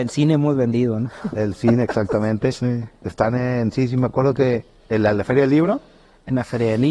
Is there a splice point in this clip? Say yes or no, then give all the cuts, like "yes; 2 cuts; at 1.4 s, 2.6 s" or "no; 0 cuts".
no; 0 cuts